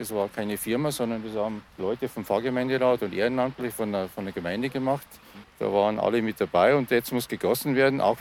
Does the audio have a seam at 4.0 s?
no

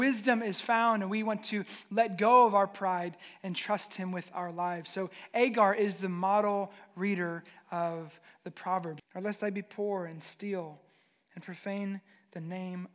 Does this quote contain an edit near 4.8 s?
no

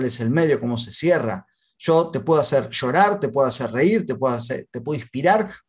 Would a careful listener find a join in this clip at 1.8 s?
no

